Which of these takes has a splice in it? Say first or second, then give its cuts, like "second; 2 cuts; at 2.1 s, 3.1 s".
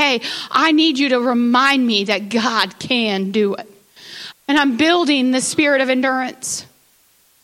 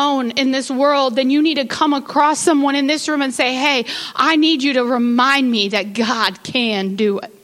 first; 1 cut; at 4.3 s